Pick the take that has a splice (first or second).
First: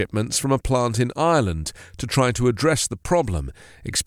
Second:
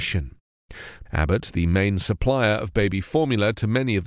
second